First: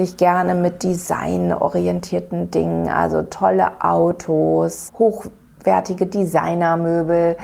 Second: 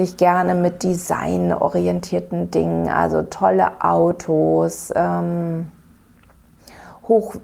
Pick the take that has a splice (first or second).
first